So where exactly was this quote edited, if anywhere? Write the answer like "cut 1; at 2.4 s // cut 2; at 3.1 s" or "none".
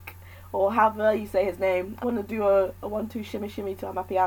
cut 1; at 2.0 s